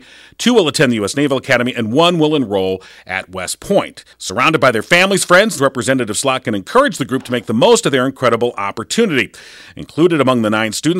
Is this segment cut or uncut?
cut